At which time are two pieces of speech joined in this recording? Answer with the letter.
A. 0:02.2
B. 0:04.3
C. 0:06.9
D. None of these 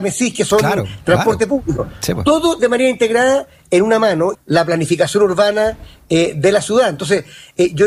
B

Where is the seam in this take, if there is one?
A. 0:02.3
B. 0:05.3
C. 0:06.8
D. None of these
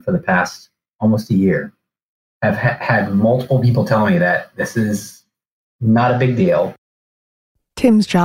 A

